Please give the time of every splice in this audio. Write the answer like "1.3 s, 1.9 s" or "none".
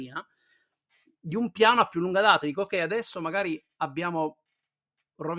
none